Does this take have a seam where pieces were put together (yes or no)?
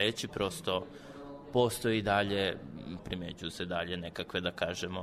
yes